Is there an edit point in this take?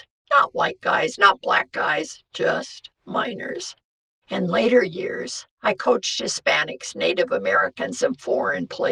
no; 0 cuts

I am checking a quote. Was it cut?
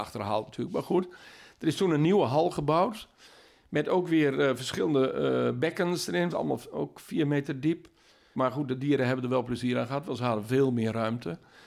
yes; 2 cuts; at 6.3 s, 8.3 s

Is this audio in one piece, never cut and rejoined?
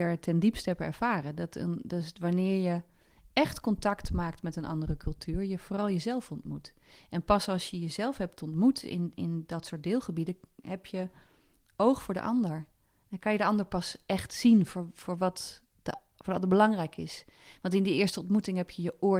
yes; 0 cuts

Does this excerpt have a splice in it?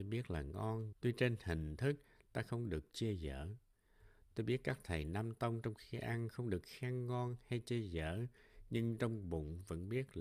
yes; 1 cut; at 0.9 s

